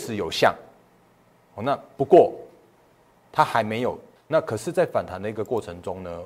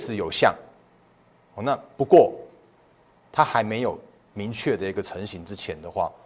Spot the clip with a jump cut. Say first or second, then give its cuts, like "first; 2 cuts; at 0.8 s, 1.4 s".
first; 1 cut; at 4.2 s